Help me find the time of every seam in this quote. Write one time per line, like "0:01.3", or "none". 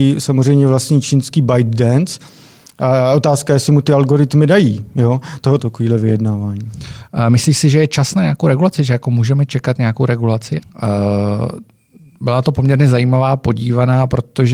0:05.6
0:07.1
0:10.6